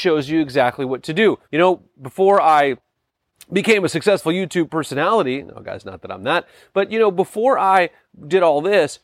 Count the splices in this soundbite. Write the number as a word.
one